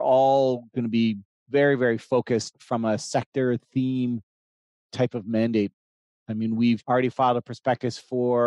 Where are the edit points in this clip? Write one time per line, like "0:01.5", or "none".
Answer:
none